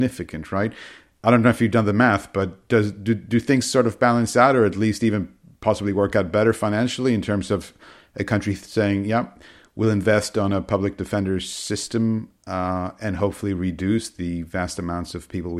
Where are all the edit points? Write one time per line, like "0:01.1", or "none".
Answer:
none